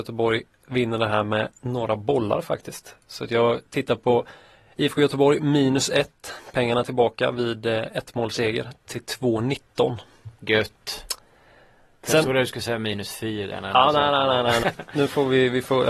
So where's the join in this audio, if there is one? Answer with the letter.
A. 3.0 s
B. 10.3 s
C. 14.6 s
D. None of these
C